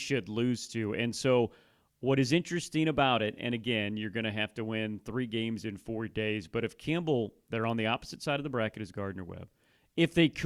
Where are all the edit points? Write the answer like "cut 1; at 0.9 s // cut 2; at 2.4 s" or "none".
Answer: none